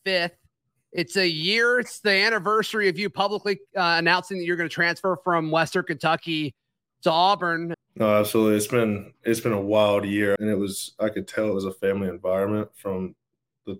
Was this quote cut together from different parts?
yes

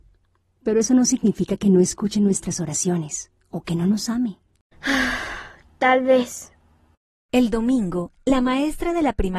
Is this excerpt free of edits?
no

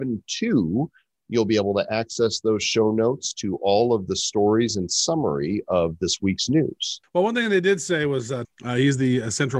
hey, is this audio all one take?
no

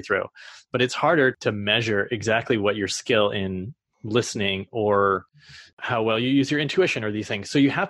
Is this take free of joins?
yes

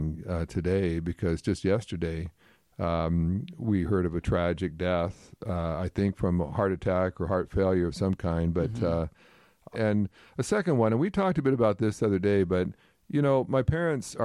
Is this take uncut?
no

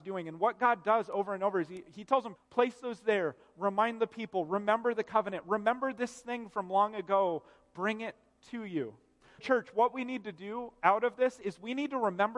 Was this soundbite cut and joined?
yes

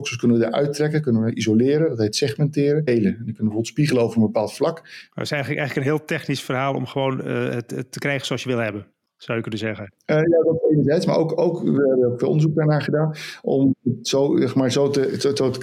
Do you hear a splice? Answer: yes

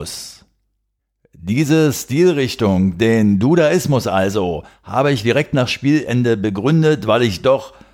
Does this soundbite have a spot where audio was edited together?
no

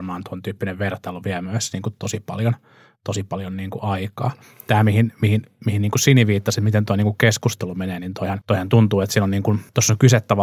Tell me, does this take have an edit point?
no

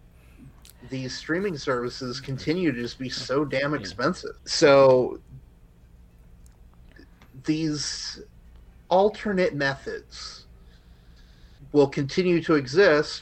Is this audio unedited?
no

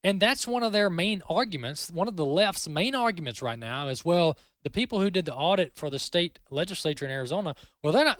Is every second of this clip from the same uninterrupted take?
no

